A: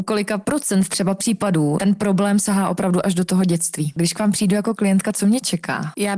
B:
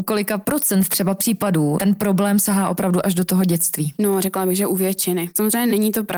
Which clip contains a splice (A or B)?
A